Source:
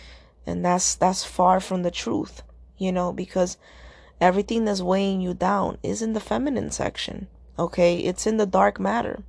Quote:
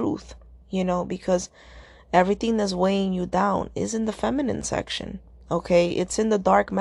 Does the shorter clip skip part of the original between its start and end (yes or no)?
no